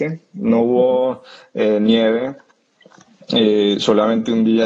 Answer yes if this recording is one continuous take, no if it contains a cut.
yes